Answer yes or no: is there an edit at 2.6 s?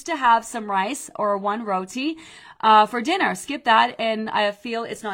no